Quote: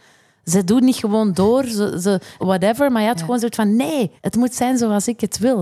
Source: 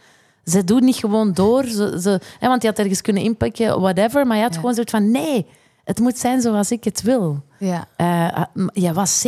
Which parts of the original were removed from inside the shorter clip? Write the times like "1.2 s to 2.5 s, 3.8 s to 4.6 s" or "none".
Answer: 2.4 s to 3.8 s, 5.5 s to 5.8 s

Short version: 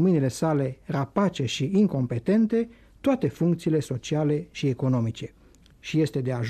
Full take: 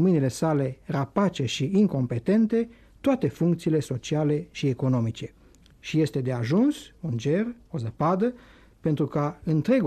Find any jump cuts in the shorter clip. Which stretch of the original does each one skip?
none

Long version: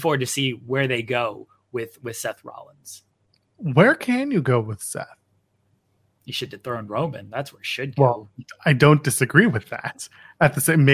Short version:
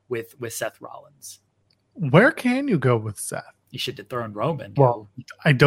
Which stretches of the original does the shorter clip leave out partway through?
5.3 s to 6.2 s, 7.3 s to 8.0 s

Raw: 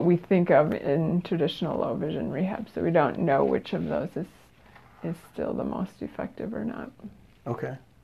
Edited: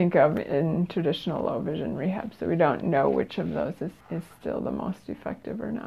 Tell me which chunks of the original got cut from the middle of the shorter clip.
4.3 s to 4.9 s

